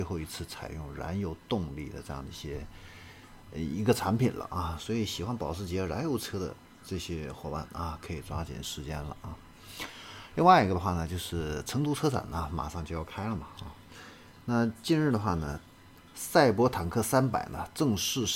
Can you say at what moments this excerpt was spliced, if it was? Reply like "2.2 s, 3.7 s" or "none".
none